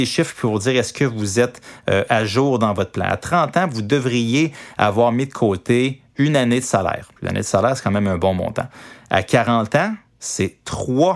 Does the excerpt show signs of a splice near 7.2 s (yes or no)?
yes